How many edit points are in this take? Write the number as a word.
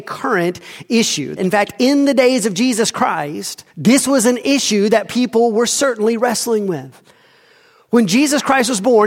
two